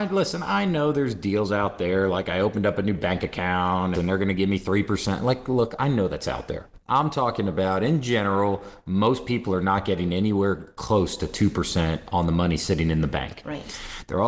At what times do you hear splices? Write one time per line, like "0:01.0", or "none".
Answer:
0:03.9